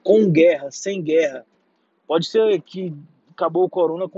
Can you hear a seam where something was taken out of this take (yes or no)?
no